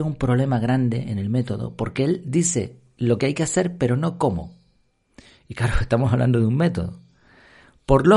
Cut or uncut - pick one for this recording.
uncut